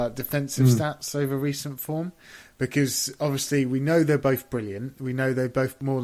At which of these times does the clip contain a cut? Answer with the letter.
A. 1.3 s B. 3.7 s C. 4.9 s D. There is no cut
D